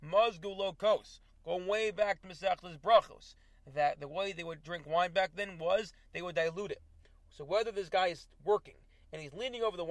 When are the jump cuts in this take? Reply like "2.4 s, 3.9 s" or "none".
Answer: none